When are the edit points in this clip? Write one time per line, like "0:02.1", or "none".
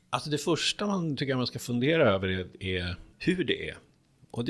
0:03.1